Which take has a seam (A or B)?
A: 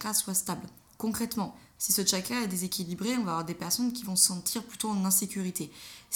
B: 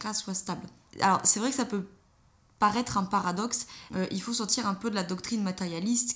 B